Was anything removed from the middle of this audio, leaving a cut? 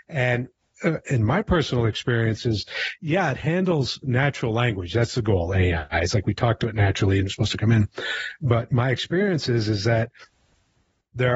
no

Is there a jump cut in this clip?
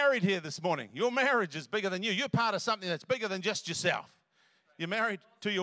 no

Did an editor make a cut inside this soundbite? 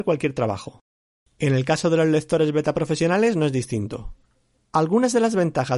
no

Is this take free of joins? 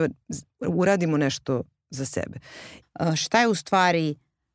no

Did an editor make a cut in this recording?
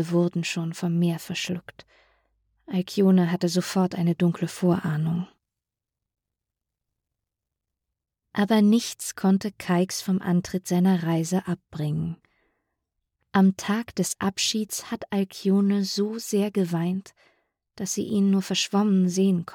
no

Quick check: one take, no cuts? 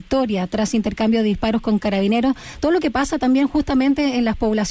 yes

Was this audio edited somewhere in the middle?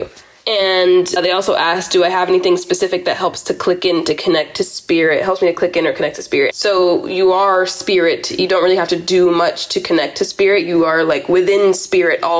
yes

